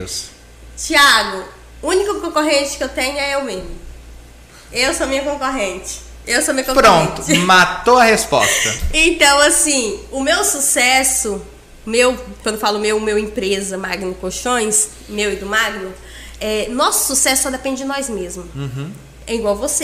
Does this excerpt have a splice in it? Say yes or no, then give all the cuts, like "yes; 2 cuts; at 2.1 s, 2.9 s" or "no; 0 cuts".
no; 0 cuts